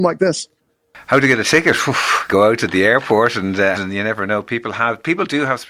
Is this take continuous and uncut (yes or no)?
no